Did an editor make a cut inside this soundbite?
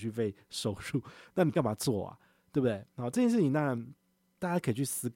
no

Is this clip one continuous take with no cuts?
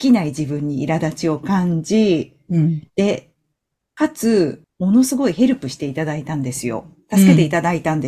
no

